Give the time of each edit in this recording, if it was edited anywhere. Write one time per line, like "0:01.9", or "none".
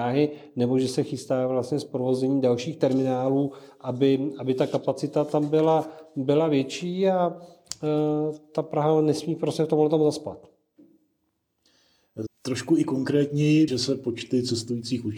0:12.3
0:13.7